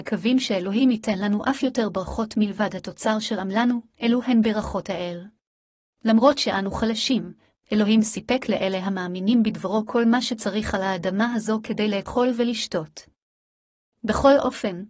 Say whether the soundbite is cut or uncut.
cut